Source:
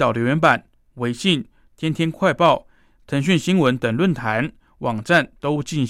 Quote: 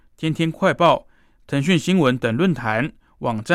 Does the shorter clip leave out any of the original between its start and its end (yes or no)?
no